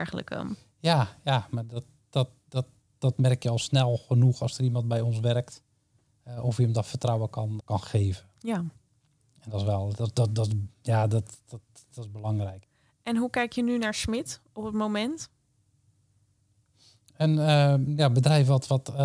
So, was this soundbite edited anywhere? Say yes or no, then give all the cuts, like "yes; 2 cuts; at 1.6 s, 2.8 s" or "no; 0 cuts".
yes; 1 cut; at 7.6 s